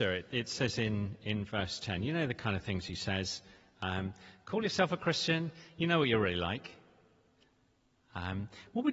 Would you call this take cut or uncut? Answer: uncut